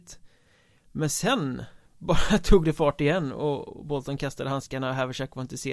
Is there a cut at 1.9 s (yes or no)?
no